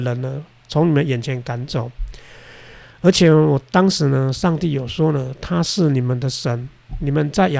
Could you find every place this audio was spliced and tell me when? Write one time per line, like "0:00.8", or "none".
none